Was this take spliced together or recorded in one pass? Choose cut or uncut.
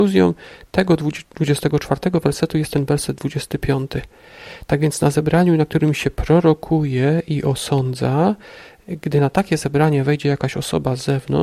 uncut